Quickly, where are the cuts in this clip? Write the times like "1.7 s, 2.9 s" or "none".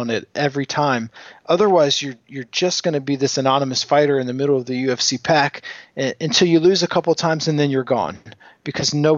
none